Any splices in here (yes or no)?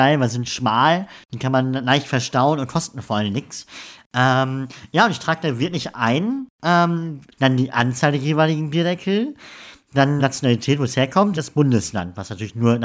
yes